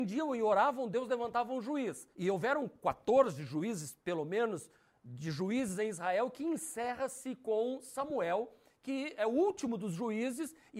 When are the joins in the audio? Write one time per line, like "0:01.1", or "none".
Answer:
0:02.1